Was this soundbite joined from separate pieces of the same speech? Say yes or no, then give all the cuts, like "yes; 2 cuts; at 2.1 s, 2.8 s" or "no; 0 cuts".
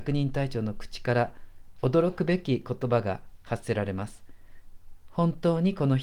no; 0 cuts